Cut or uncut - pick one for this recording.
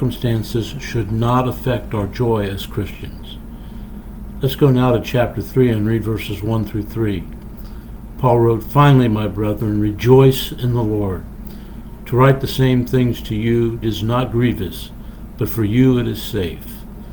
cut